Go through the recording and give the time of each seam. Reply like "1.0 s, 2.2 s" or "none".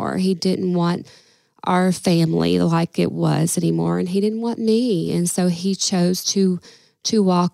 none